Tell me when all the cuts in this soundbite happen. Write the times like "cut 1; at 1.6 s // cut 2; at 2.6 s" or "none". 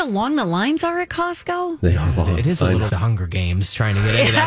cut 1; at 2.9 s

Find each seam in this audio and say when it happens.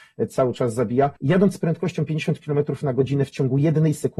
cut 1; at 1.2 s

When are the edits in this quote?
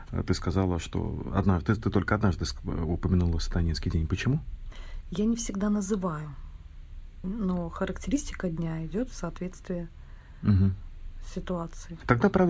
cut 1; at 7.2 s

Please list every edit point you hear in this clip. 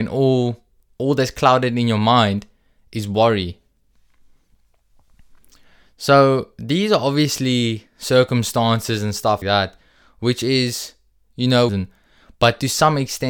cut 1; at 9.4 s // cut 2; at 11.7 s

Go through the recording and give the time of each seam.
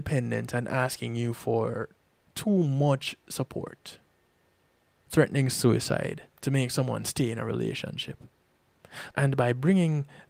cut 1; at 5.1 s // cut 2; at 6.3 s // cut 3; at 9.1 s

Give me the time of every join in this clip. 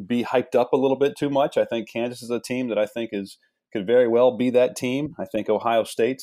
none

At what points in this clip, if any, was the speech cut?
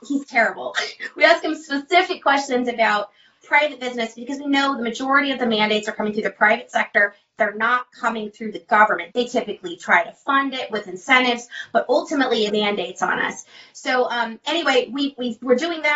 cut 1; at 9.1 s // cut 2; at 12.5 s

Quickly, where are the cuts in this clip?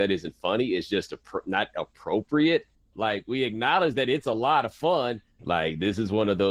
cut 1; at 2.9 s // cut 2; at 5.4 s

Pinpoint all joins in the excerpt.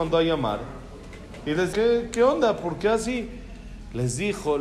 cut 1; at 1.7 s

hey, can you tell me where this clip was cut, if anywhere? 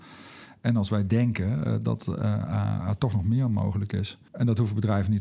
cut 1; at 4.3 s

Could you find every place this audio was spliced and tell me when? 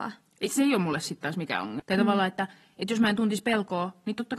cut 1; at 1.8 s

